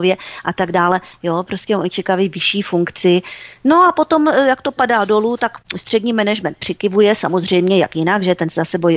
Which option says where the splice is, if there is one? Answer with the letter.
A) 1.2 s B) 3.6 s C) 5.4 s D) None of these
D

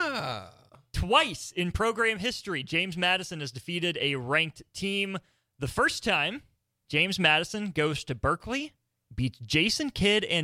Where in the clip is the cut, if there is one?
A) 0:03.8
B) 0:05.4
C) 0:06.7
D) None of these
C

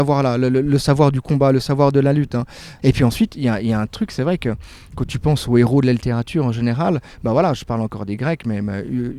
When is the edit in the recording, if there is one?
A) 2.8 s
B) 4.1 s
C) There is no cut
A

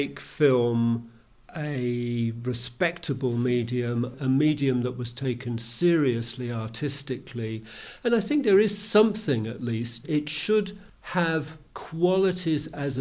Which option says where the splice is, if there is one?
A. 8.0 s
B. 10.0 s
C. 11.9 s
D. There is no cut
B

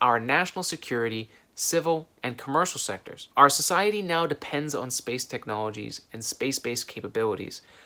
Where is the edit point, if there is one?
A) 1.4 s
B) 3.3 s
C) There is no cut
B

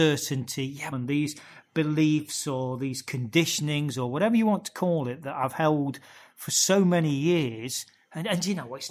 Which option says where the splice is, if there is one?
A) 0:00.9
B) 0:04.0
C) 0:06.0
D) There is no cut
A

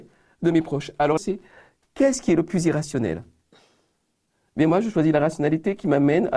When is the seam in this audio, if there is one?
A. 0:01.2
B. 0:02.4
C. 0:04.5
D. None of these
A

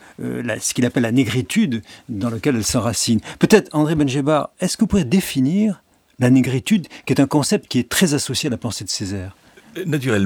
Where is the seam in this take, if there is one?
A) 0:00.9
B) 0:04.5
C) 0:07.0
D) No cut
D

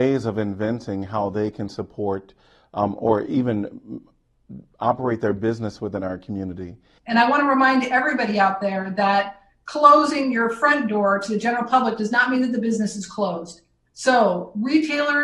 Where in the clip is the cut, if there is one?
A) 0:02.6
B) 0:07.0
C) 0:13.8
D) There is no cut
B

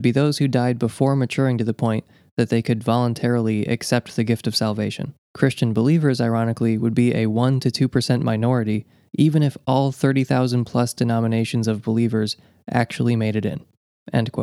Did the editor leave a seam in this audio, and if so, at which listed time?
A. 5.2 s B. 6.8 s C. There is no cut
A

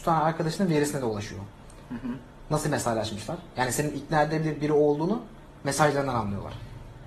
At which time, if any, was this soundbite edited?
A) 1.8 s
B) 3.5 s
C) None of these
C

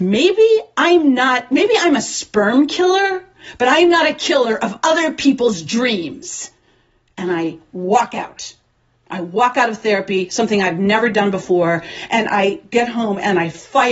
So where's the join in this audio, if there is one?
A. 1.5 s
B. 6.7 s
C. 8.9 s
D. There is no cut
D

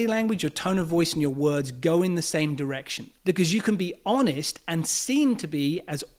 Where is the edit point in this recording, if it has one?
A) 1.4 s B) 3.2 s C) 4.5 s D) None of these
B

